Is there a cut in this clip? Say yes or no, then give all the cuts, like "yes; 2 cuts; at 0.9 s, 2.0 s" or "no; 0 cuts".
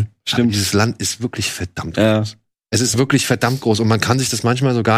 no; 0 cuts